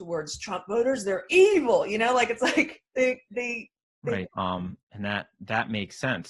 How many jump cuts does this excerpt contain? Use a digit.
2